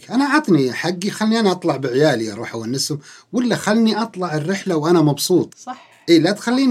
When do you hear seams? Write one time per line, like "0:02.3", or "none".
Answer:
0:05.5